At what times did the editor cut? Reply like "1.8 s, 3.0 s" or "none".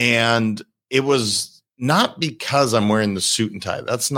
none